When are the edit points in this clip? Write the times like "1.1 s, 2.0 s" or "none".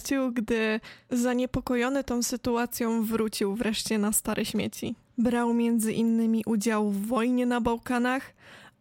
5.0 s

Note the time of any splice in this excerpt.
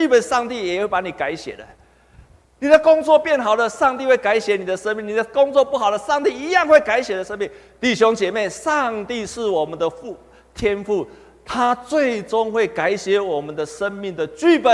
none

